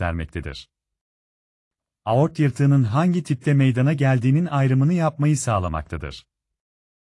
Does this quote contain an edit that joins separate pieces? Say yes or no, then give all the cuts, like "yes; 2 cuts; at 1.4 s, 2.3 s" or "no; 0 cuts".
no; 0 cuts